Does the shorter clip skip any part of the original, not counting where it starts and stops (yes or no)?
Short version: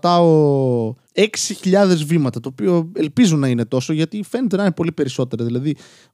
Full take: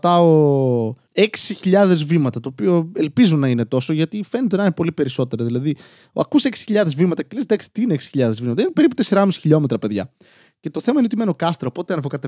no